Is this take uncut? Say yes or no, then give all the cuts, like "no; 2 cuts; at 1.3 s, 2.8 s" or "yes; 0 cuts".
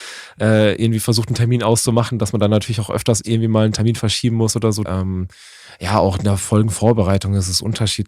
no; 1 cut; at 4.9 s